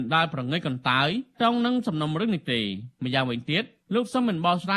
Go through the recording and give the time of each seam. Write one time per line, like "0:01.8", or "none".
0:01.3